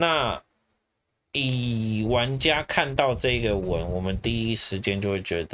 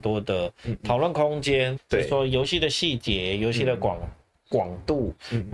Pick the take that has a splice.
second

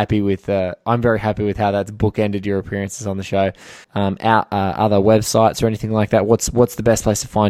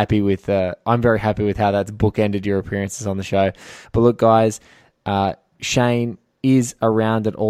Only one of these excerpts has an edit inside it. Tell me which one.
first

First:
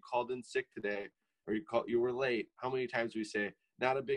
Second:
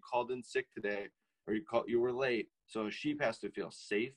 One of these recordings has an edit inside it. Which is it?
second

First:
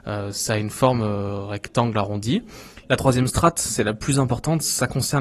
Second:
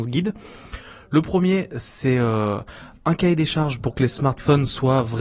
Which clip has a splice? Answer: first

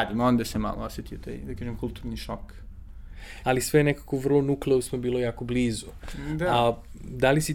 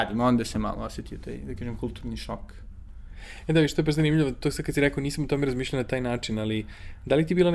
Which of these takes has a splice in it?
first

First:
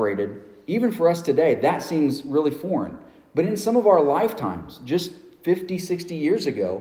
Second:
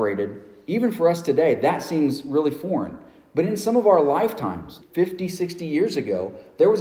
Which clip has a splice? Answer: second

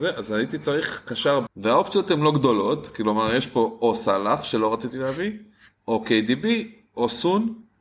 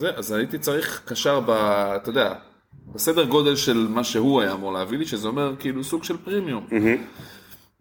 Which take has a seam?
first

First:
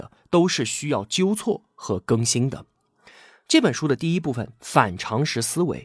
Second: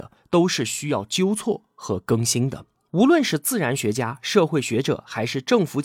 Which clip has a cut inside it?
second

